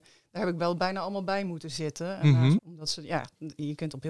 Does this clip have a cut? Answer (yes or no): yes